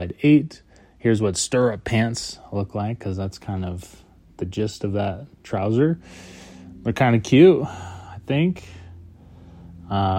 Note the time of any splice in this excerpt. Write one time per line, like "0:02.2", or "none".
none